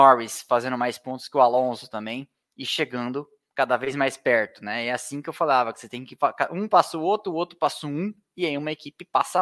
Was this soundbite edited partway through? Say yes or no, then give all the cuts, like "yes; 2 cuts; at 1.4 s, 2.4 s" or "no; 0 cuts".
no; 0 cuts